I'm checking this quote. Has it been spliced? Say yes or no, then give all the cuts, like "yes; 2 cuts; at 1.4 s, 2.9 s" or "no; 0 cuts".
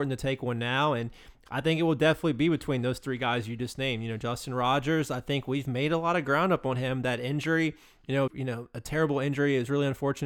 yes; 1 cut; at 8.3 s